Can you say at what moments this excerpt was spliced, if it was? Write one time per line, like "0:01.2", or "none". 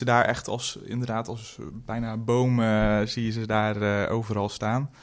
none